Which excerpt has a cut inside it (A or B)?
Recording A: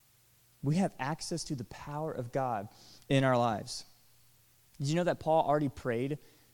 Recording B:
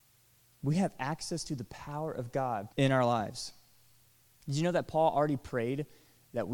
B